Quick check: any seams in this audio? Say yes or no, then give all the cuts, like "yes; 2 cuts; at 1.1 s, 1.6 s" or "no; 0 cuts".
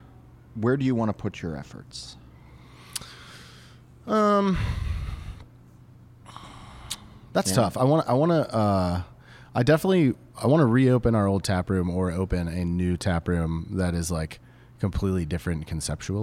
no; 0 cuts